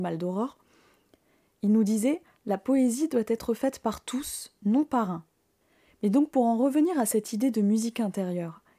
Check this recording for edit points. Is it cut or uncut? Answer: uncut